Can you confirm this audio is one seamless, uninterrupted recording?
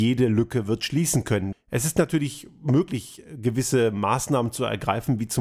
no; 1 cut; at 1.5 s

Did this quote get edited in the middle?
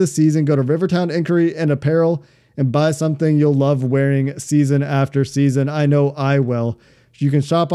no; 0 cuts

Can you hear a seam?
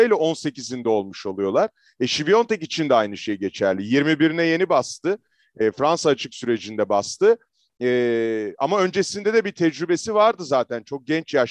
no; 0 cuts

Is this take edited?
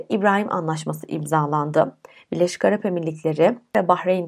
no; 0 cuts

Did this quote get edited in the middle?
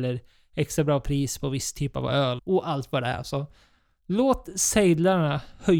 yes; 1 cut; at 2.4 s

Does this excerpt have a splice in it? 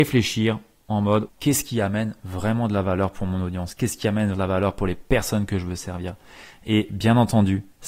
yes; 2 cuts; at 1.3 s, 4.3 s

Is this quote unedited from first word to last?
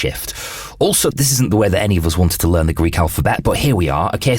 no; 1 cut; at 1.1 s

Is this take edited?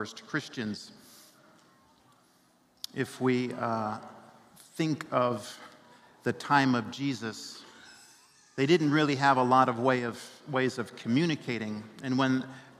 no; 0 cuts

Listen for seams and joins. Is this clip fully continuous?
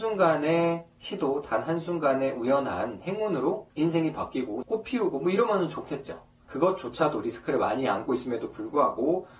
no; 2 cuts; at 4.6 s, 6.5 s

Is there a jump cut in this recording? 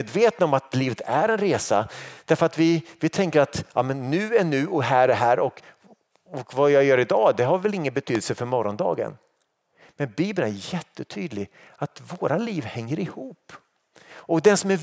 no; 0 cuts

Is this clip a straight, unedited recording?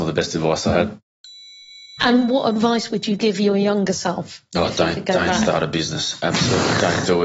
yes; 0 cuts

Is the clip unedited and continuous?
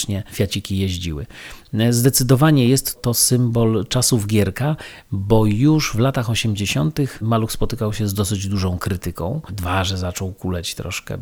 yes; 0 cuts

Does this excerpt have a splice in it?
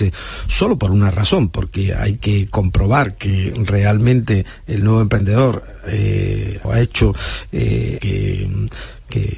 yes; 2 cuts; at 6.6 s, 8.0 s

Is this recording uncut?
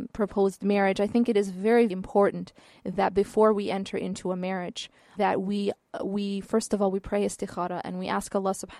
no; 2 cuts; at 1.9 s, 5.1 s

